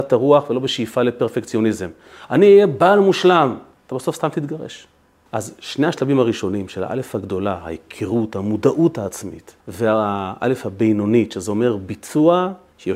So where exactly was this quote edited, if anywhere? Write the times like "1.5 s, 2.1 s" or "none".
5.3 s, 9.6 s